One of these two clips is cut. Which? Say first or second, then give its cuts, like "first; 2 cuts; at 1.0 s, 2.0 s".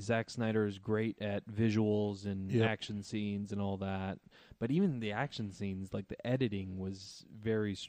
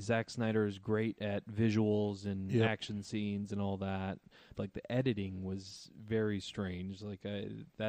second; 1 cut; at 4.5 s